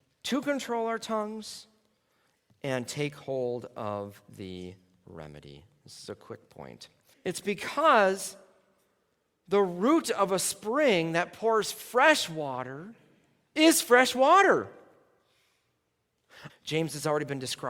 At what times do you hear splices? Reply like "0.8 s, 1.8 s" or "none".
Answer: 7.1 s, 16.5 s